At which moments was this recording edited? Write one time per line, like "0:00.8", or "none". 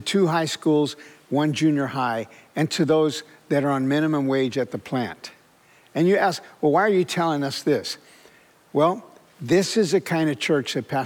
none